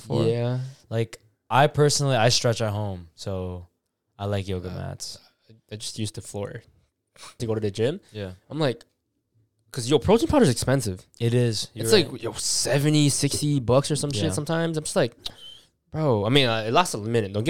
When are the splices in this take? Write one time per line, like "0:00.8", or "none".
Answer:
0:07.4